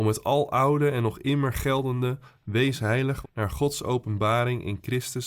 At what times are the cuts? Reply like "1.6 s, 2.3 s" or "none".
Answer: 3.2 s